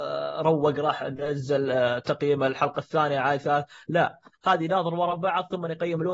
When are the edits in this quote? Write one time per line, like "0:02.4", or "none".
none